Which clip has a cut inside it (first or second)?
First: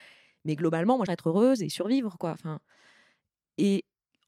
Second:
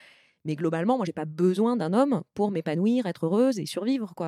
first